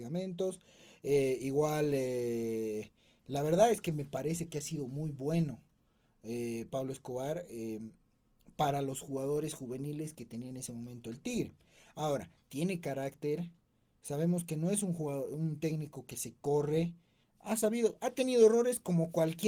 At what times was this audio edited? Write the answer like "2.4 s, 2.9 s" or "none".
none